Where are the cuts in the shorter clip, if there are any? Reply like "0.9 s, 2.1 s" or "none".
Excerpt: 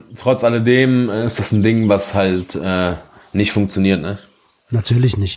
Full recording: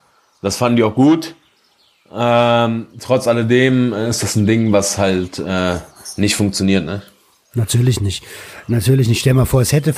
none